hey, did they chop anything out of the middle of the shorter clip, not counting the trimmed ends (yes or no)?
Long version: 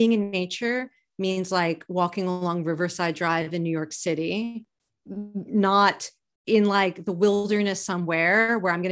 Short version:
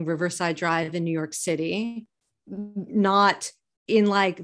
no